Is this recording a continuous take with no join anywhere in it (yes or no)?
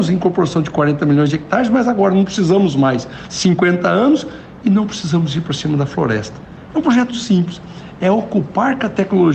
no